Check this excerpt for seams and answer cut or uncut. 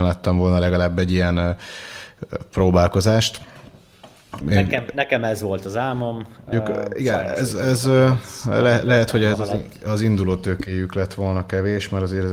cut